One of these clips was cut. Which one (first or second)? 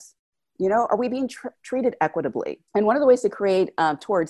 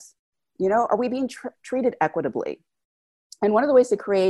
first